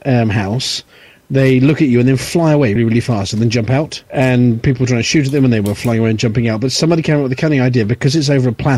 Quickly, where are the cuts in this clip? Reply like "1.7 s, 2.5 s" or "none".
2.8 s, 4.1 s